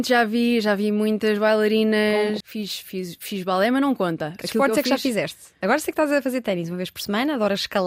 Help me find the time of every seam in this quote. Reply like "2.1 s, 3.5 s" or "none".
2.4 s